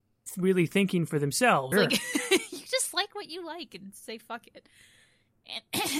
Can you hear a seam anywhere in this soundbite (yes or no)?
yes